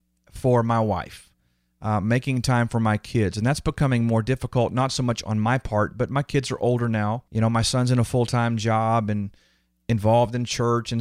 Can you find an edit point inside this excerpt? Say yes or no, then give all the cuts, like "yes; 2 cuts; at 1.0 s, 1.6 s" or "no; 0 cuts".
yes; 1 cut; at 7.3 s